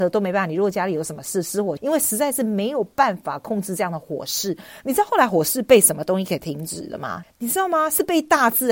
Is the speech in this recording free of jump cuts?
no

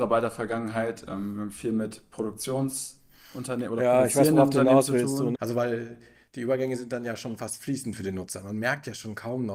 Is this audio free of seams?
no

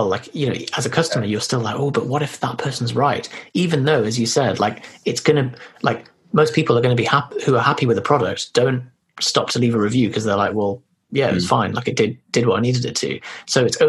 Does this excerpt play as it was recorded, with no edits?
yes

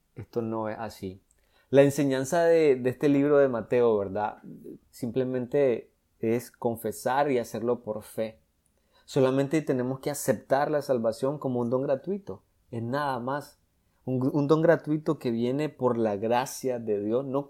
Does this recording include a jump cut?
yes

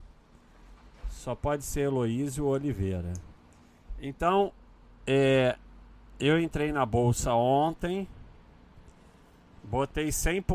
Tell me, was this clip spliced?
no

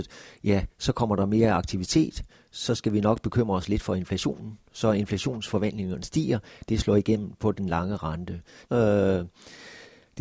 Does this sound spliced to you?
yes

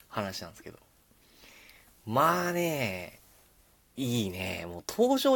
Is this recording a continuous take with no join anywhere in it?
yes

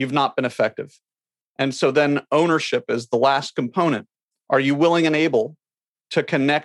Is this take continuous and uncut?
yes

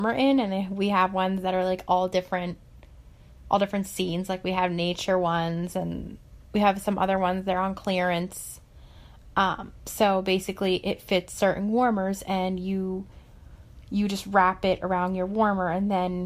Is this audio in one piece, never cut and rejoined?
yes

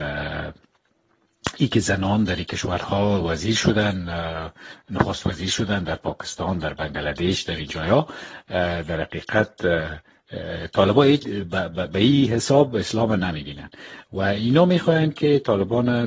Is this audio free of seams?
no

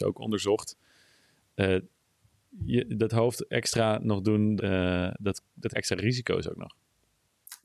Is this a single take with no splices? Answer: no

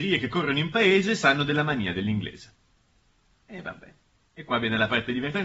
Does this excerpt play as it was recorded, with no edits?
yes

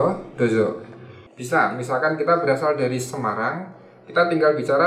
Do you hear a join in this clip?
yes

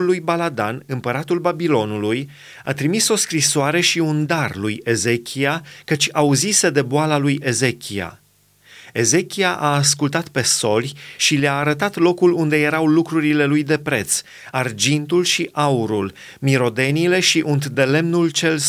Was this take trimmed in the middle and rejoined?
no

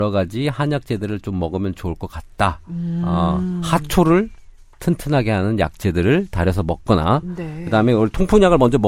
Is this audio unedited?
yes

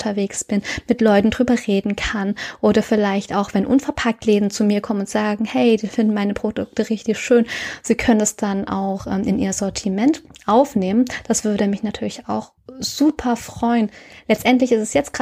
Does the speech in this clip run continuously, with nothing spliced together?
yes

